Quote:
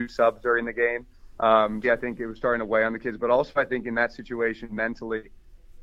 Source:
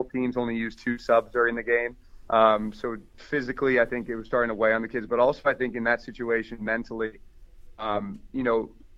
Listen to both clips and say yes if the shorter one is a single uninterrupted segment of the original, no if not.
no